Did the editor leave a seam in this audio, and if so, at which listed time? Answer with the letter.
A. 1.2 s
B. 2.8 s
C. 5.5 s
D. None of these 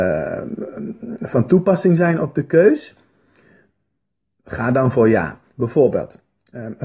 D